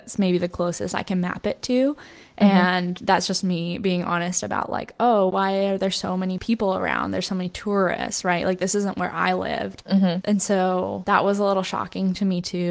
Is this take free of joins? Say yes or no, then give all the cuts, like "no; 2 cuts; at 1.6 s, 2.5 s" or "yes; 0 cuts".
yes; 0 cuts